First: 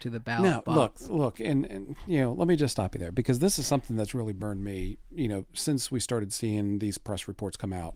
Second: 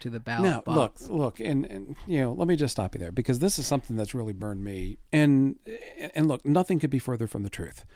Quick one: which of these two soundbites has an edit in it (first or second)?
second